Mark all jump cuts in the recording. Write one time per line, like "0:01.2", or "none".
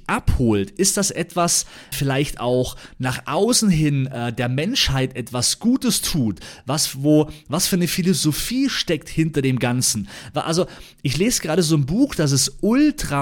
0:01.9